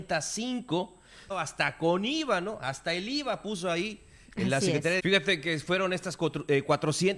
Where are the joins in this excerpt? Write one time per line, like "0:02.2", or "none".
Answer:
0:01.3
0:05.0